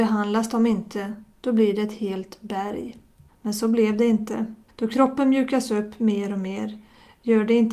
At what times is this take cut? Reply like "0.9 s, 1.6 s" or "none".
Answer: 3.3 s, 4.7 s

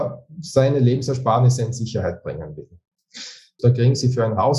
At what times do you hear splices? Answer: 3.6 s

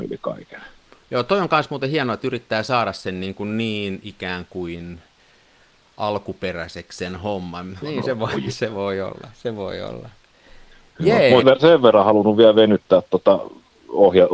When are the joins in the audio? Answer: 7.8 s, 11.4 s

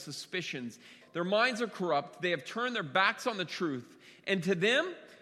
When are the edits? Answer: 1.0 s

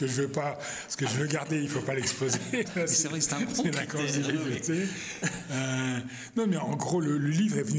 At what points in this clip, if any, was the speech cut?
2.6 s

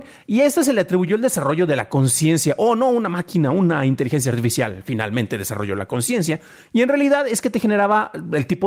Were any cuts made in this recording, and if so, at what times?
none

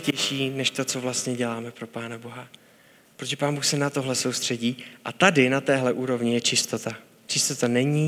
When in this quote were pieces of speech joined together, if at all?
none

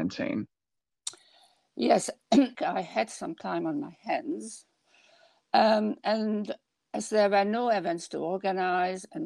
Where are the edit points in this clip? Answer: 2.5 s

